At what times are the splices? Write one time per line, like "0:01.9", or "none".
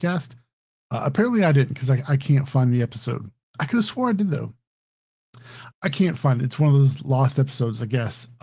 0:05.7